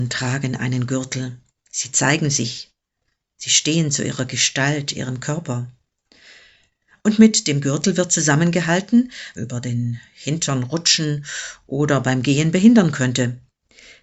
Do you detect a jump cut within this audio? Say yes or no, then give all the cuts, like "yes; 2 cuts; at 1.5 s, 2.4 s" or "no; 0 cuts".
yes; 1 cut; at 9.4 s